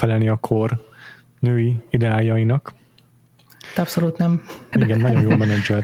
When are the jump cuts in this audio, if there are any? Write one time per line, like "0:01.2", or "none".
0:04.7